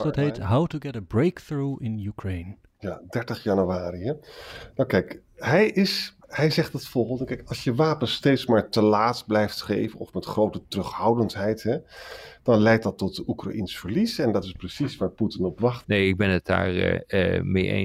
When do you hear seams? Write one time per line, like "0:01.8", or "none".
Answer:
0:06.2
0:15.8